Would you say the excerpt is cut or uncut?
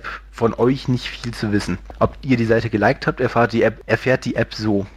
uncut